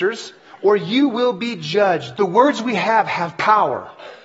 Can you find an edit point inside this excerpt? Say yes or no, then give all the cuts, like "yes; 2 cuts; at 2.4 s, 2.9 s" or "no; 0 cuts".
yes; 1 cut; at 2.1 s